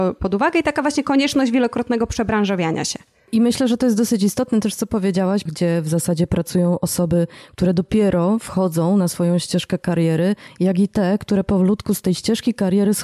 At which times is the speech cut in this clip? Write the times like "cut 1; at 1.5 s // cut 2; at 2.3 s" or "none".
cut 1; at 5.5 s